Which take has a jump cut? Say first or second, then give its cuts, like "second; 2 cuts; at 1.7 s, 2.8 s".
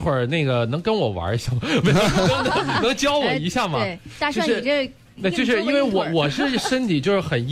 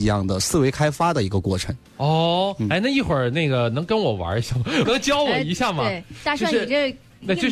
second; 1 cut; at 4.9 s